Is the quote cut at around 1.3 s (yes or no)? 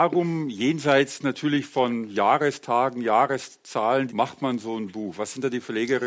no